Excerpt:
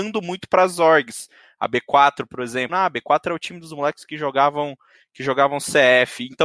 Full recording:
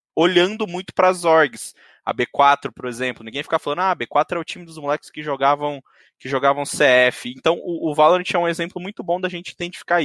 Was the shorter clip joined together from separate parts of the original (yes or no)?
yes